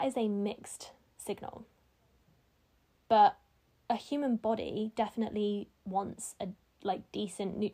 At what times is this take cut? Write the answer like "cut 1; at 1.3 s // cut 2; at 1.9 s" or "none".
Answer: cut 1; at 2.9 s